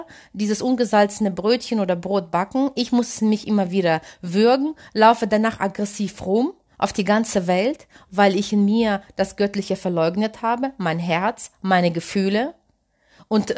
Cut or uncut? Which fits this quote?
uncut